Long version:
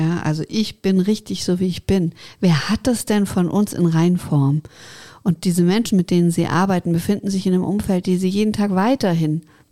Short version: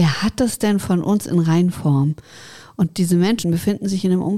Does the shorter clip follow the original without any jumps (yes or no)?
no